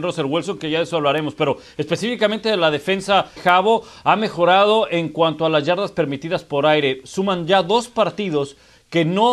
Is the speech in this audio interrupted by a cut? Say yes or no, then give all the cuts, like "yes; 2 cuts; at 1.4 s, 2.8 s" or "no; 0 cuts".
yes; 1 cut; at 3.4 s